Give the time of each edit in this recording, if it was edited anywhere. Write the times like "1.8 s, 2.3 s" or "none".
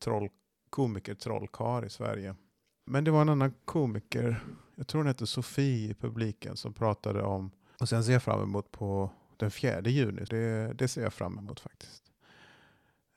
2.9 s, 7.8 s, 10.3 s